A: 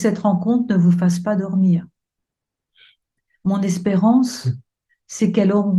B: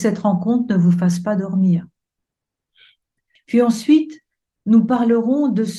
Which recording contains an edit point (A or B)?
B